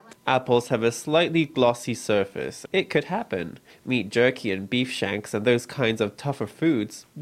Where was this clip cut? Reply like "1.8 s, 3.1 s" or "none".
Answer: 2.7 s